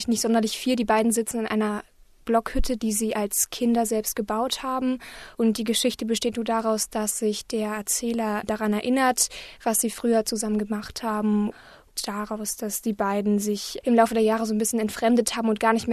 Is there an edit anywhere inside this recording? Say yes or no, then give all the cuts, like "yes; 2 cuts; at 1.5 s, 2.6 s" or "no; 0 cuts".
yes; 1 cut; at 6.3 s